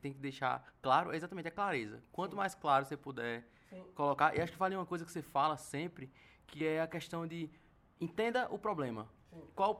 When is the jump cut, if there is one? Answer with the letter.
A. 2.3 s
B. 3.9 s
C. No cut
C